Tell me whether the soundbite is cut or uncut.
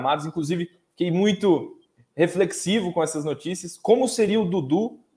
uncut